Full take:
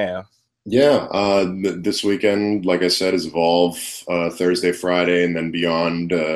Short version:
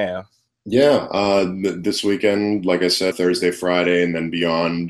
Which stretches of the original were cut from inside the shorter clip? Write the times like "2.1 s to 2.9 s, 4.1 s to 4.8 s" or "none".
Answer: 3.1 s to 4.3 s